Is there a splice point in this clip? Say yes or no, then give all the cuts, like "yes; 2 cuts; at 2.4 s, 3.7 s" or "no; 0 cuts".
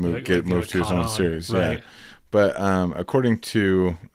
no; 0 cuts